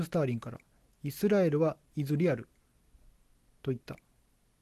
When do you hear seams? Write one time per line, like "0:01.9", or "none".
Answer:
none